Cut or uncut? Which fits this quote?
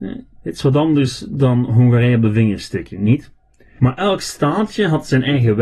cut